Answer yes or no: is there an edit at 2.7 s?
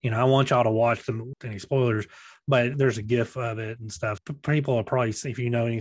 yes